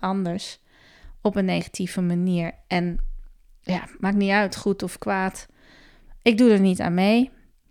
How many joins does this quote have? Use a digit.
0